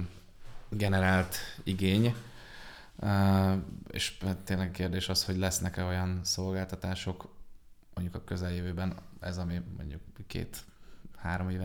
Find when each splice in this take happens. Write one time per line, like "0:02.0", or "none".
none